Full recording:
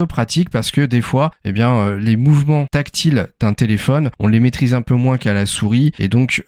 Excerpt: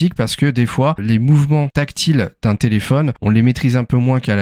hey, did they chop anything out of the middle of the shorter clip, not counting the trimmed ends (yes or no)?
yes